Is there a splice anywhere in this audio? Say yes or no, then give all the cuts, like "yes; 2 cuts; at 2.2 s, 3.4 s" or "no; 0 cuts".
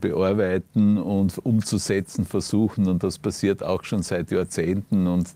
no; 0 cuts